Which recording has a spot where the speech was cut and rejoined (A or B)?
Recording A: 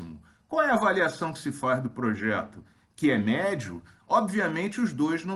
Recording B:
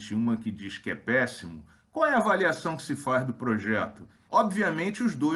B